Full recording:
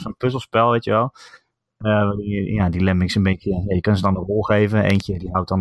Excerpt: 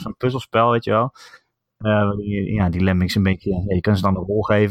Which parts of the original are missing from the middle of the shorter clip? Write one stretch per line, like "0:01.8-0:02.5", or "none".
none